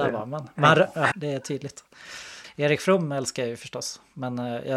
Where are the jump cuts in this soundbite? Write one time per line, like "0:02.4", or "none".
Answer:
0:01.1